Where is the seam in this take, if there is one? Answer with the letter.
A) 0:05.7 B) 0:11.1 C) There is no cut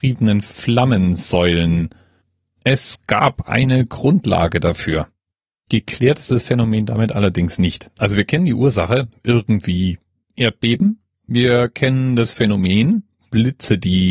A